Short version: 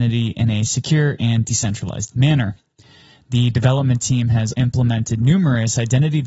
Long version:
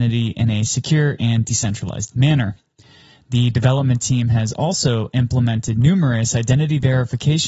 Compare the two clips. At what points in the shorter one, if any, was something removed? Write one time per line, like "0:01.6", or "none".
0:04.5